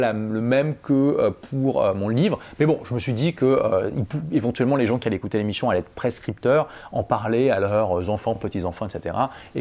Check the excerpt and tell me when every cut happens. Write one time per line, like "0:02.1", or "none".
none